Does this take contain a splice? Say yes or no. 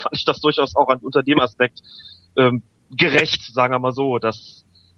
no